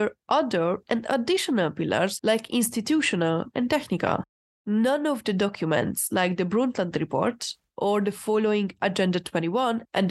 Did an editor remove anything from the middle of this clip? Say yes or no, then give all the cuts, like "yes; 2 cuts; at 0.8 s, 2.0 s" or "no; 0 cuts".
yes; 1 cut; at 3.5 s